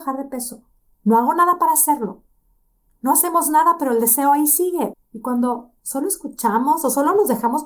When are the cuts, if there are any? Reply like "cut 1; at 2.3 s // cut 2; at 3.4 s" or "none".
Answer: cut 1; at 4.9 s